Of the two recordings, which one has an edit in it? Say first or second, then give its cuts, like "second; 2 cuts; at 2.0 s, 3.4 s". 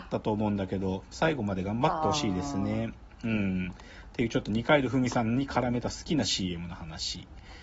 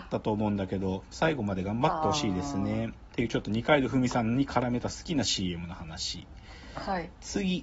second; 1 cut; at 3.1 s